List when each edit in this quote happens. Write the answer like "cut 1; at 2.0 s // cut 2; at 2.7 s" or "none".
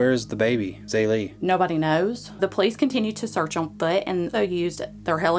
cut 1; at 4.3 s